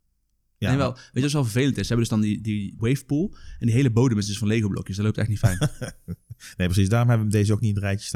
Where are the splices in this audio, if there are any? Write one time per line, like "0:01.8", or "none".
0:02.8

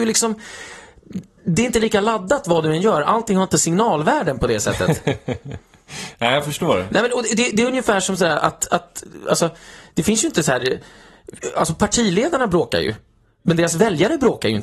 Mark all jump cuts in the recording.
none

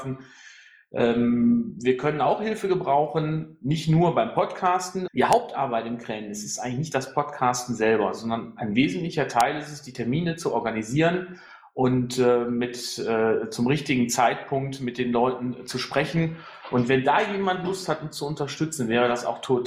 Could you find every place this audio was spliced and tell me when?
0:05.1

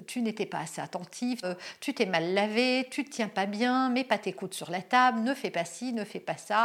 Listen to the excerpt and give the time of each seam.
0:01.4

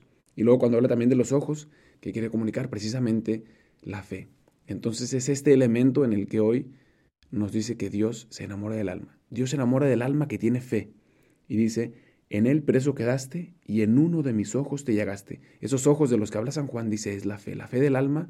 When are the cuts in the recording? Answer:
0:01.9

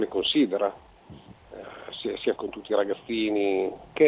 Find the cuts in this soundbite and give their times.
0:01.3
0:02.4

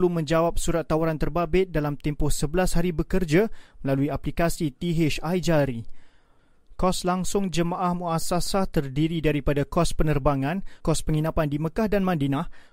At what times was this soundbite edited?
0:10.8

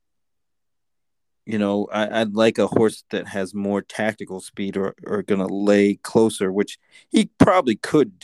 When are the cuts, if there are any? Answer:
none

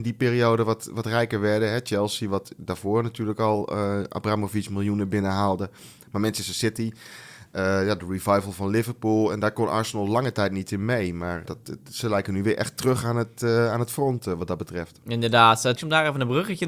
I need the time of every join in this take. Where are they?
0:11.5
0:15.8

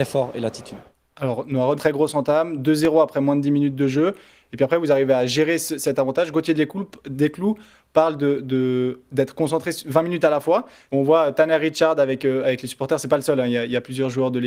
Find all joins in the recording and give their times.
0:01.8
0:10.9

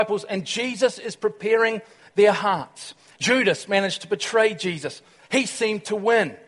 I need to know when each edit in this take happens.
0:03.1

